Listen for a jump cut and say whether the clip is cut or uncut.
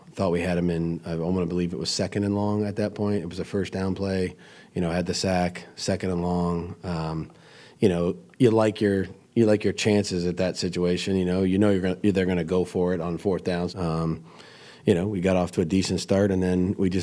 cut